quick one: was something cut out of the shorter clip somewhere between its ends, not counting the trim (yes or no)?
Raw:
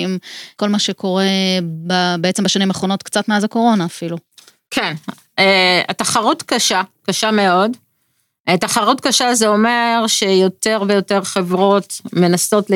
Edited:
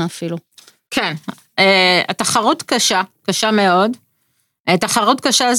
no